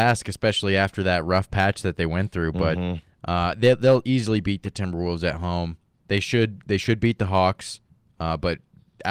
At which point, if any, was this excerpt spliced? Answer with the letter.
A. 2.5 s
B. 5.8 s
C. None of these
C